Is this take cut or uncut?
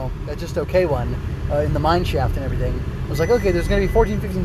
uncut